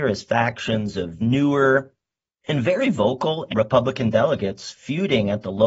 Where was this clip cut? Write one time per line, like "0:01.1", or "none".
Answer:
0:03.5